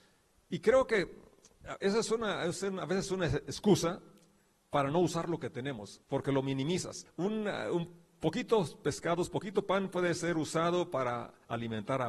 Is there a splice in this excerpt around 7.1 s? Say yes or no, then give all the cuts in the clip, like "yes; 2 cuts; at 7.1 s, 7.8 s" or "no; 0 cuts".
yes; 2 cuts; at 6.0 s, 7.1 s